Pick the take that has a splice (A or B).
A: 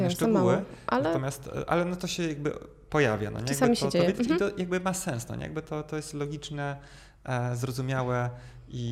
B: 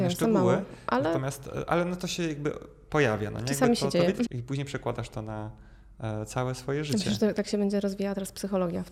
B